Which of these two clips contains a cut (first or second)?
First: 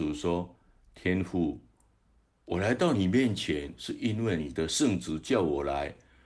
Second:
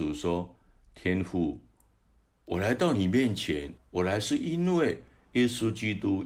second